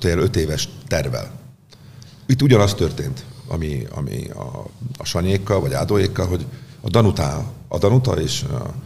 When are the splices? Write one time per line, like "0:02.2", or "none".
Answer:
0:02.3

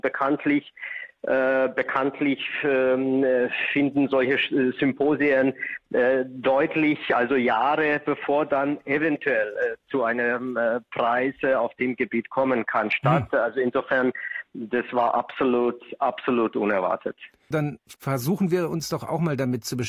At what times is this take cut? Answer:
0:17.5

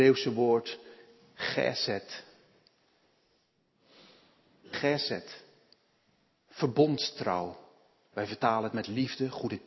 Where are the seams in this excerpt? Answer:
none

